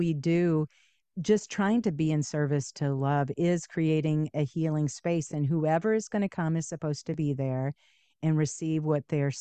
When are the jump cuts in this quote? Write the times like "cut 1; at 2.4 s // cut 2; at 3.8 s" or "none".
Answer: none